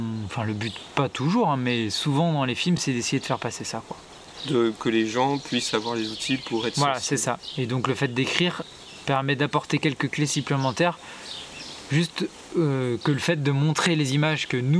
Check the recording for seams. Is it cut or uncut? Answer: uncut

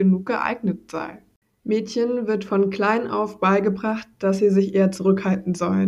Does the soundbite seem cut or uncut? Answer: cut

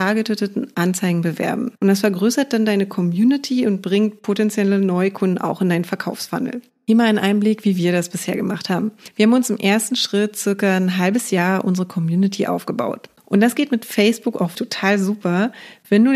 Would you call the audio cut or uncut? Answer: cut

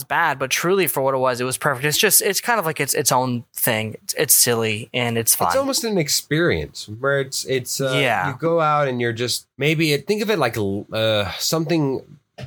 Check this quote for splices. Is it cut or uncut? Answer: cut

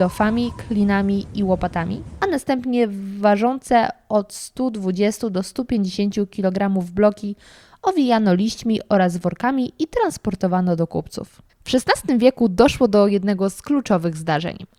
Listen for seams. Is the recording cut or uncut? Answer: cut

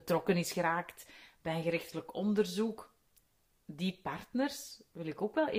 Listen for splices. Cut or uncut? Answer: uncut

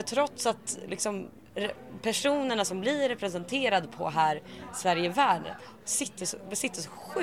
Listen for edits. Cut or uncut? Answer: uncut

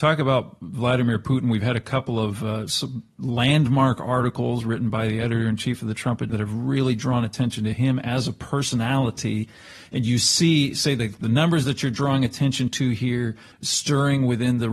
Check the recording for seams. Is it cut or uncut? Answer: cut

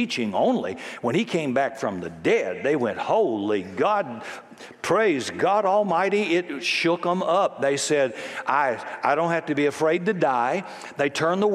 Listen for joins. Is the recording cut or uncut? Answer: uncut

